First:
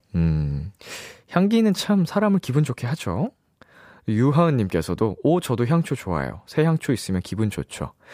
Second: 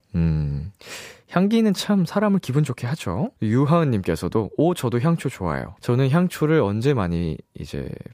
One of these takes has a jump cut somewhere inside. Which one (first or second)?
second